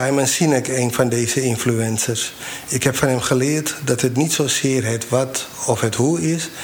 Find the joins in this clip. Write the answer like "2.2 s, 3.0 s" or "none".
none